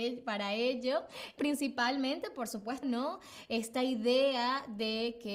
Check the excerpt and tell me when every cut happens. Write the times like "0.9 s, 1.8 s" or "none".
1.4 s, 2.8 s